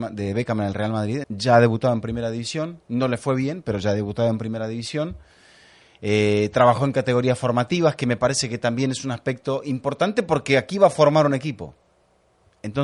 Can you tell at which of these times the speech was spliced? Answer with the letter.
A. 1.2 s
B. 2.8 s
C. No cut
A